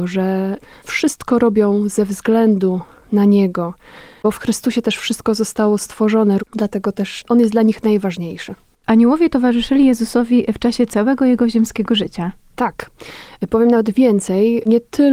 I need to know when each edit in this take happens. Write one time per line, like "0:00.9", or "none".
0:06.4